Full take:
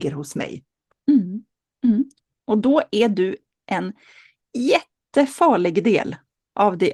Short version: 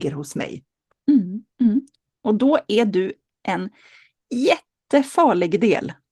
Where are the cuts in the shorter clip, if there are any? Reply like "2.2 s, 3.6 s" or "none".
1.5 s